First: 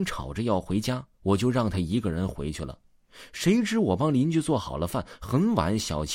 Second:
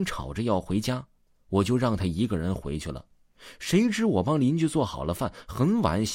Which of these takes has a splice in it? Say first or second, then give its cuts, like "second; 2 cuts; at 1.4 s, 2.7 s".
first; 1 cut; at 1.1 s